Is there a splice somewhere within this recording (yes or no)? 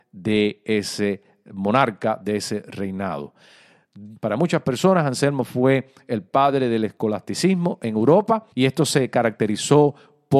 yes